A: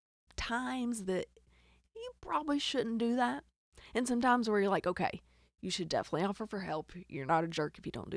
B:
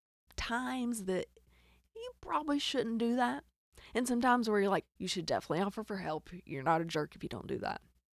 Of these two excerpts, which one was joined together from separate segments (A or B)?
B